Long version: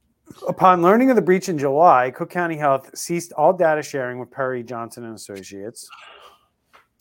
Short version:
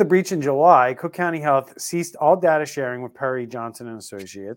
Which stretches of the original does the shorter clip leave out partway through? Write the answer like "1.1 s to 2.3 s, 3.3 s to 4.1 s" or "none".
none